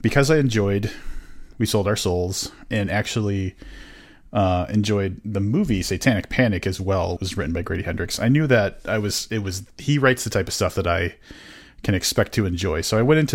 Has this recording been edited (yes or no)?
yes